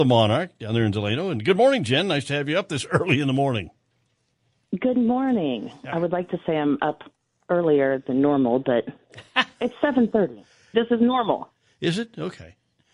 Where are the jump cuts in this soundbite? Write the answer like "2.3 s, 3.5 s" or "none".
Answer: 10.7 s